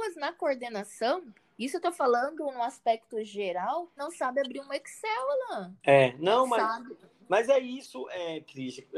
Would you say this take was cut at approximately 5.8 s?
no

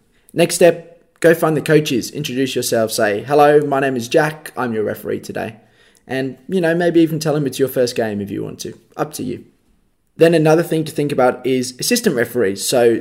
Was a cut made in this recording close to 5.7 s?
no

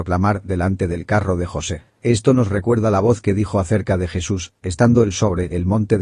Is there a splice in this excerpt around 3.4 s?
no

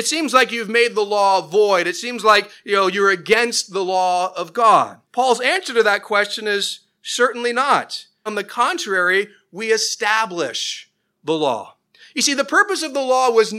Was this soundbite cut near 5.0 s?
yes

